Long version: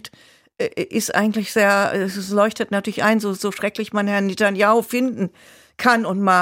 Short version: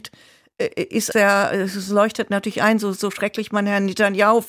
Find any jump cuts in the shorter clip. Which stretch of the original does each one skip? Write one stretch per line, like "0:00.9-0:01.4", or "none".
0:01.1-0:01.5